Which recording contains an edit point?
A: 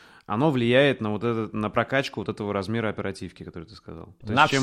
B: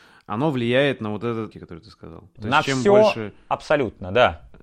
B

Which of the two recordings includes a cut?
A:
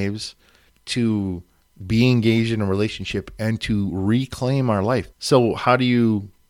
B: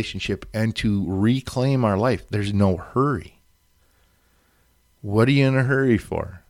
A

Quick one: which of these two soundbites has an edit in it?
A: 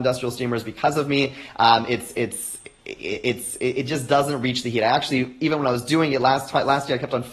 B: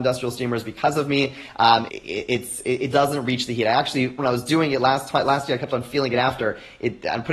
B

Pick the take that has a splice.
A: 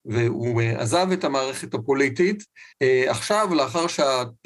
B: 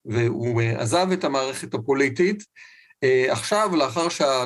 A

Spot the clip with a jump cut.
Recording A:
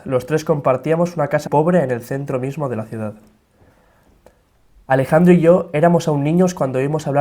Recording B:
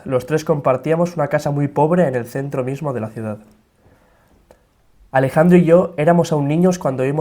A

